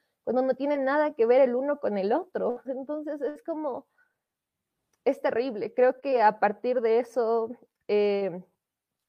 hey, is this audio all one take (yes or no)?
no